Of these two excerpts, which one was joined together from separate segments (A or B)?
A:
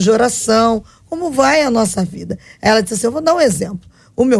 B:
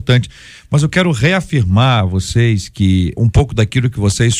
B